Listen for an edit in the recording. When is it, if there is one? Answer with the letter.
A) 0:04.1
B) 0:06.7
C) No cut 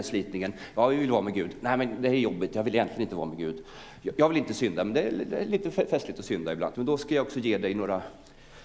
B